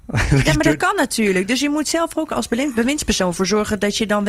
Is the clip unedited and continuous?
yes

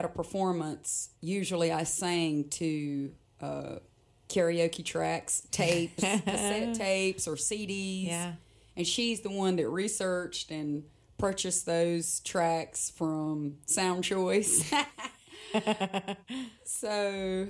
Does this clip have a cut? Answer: no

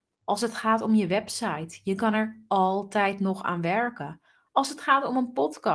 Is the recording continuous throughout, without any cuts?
yes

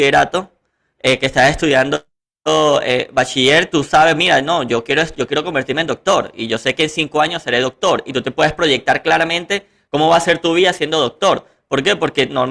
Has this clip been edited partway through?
no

